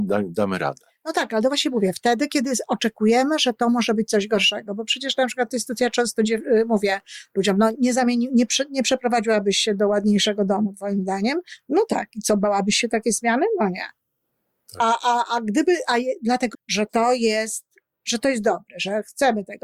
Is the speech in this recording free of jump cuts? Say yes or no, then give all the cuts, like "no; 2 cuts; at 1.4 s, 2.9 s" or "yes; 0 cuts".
no; 2 cuts; at 7.7 s, 16.5 s